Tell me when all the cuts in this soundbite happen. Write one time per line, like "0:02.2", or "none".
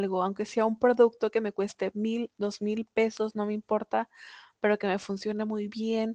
none